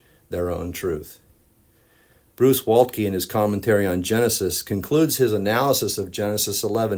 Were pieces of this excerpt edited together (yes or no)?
no